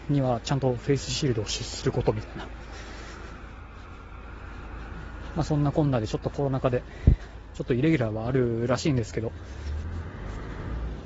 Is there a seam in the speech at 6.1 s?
no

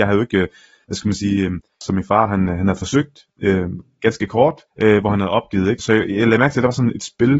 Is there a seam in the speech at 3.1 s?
no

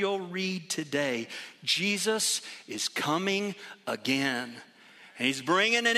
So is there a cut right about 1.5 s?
no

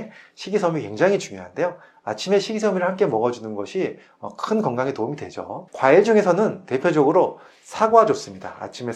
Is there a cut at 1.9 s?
no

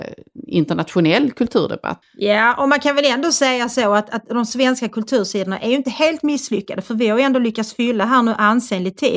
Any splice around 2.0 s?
yes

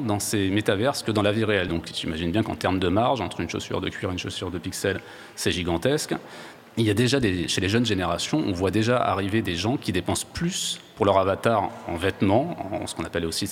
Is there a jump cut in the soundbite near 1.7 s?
yes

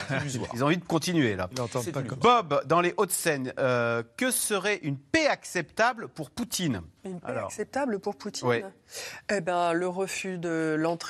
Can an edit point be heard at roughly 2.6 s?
no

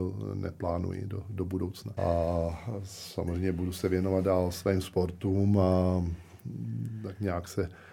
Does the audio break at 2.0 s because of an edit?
yes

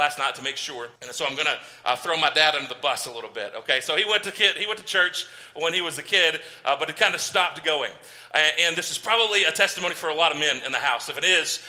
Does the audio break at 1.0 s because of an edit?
yes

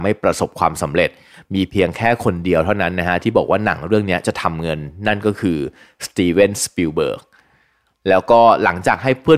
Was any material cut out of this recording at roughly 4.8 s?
no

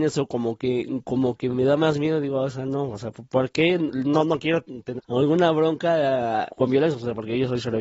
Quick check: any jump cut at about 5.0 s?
yes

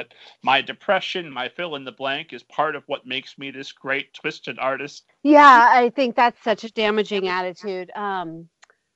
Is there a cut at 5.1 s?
yes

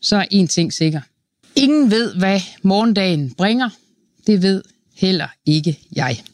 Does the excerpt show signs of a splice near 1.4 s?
yes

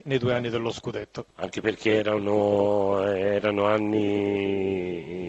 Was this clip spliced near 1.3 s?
yes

